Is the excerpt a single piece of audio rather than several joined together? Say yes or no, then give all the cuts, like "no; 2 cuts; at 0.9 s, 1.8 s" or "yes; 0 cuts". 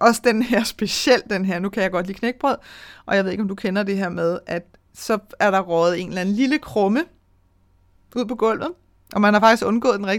yes; 0 cuts